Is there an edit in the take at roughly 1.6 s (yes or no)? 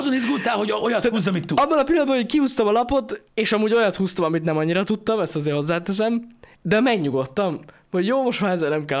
no